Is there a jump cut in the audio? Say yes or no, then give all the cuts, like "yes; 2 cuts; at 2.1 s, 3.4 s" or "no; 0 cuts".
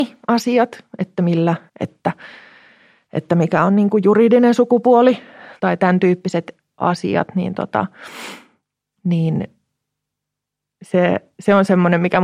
yes; 2 cuts; at 1.7 s, 5.6 s